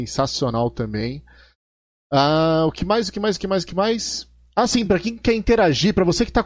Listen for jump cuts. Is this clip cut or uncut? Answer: uncut